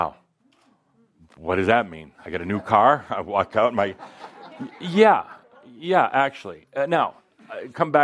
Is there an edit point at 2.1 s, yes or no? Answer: no